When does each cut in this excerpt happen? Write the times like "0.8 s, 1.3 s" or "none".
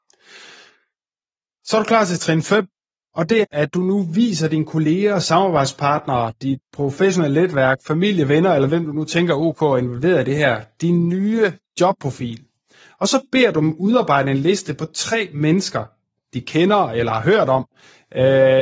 3.4 s